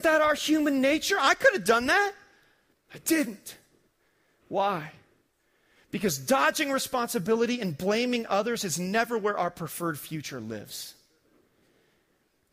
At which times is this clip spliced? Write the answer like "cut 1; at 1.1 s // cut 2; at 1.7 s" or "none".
cut 1; at 2.7 s